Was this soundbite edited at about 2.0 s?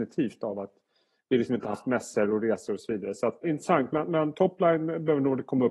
no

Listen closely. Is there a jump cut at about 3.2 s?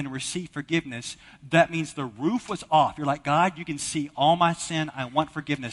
no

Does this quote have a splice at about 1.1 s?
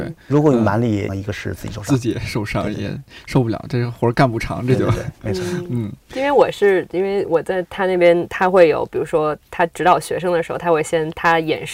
yes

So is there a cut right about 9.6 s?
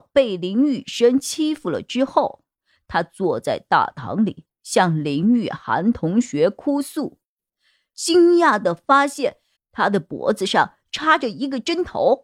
yes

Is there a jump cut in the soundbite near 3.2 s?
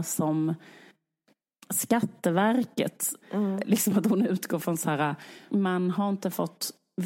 yes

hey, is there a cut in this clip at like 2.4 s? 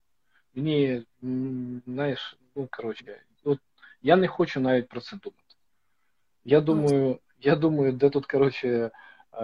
no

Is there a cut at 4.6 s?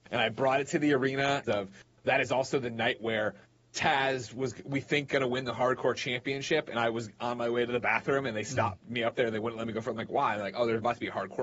no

